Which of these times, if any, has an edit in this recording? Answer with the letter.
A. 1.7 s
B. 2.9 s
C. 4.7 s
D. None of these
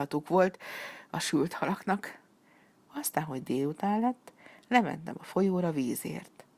B